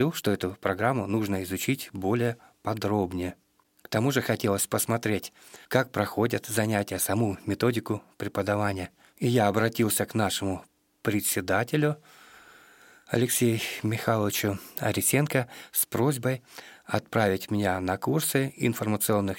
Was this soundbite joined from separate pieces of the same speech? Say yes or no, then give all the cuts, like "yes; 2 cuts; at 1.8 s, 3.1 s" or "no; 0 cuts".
yes; 1 cut; at 5.6 s